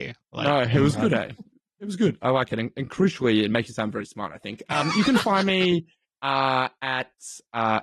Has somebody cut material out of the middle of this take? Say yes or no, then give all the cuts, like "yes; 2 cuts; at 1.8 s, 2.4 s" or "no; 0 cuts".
no; 0 cuts